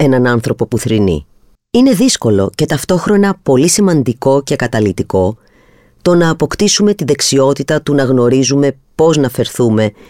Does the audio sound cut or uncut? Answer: cut